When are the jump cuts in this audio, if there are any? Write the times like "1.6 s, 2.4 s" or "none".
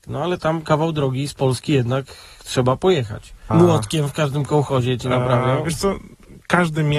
3.5 s